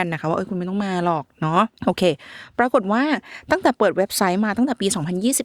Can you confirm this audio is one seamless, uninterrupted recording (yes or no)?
no